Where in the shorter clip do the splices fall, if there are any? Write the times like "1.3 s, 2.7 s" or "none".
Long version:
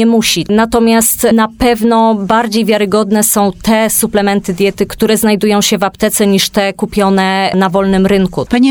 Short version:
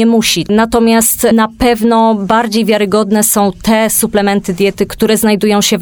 none